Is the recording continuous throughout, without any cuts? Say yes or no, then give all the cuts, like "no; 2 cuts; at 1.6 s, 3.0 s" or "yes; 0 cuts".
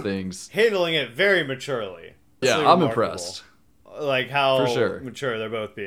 no; 1 cut; at 2.4 s